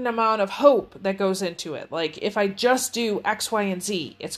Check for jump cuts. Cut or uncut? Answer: uncut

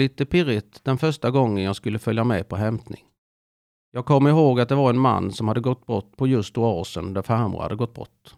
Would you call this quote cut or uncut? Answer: uncut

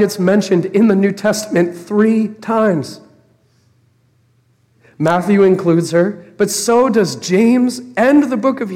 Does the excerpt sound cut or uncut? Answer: uncut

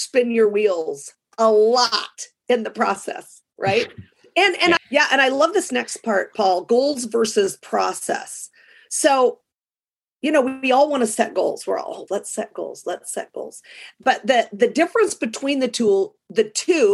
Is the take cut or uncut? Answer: cut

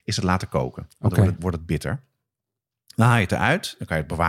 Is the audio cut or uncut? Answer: uncut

